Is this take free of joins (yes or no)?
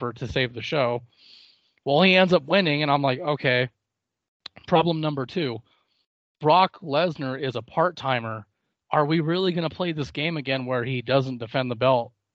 yes